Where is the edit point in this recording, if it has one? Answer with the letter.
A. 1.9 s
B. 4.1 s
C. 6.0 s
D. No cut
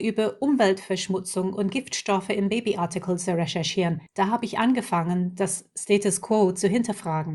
B